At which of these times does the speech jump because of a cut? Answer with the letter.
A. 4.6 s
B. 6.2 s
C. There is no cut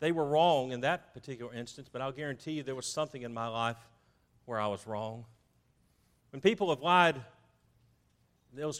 B